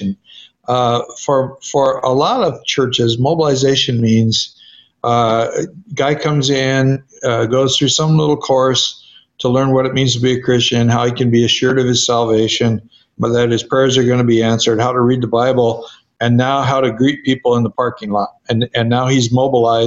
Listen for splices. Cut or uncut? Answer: uncut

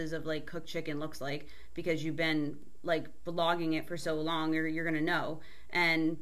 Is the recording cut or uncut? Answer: uncut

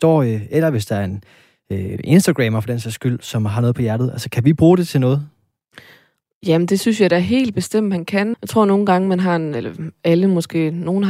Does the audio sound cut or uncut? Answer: cut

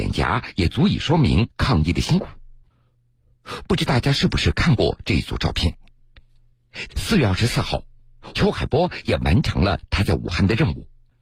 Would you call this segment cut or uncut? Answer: cut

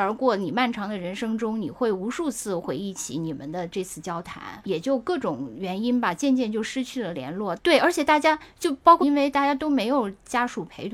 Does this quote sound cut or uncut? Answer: cut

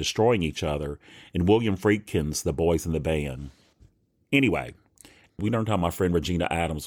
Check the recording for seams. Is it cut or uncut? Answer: cut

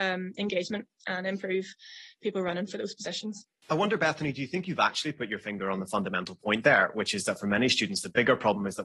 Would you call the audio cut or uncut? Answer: uncut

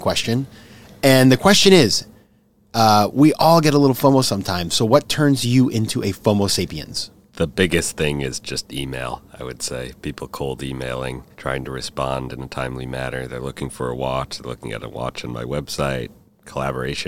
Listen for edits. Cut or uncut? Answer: cut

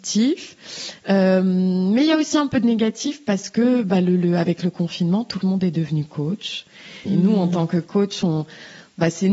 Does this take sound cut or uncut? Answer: cut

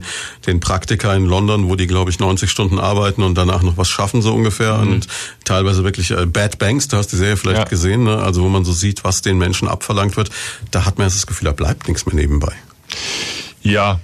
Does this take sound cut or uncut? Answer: uncut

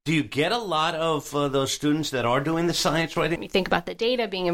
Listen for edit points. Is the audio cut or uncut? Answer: cut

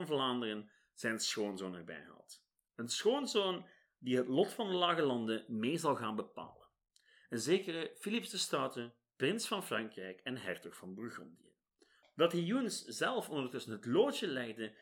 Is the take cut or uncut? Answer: cut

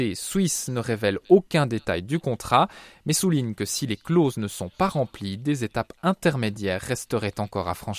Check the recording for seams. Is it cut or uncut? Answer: uncut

